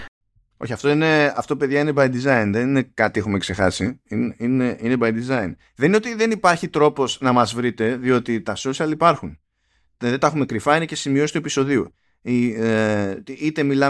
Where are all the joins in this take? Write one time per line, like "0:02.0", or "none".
none